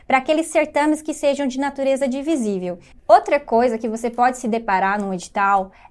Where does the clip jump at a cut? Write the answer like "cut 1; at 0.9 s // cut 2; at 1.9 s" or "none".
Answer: cut 1; at 2.9 s